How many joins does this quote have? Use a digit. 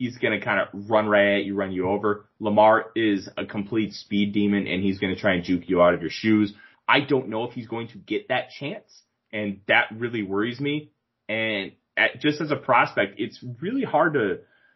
1